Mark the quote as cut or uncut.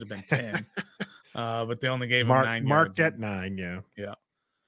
uncut